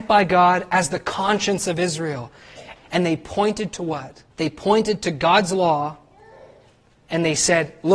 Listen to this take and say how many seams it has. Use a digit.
2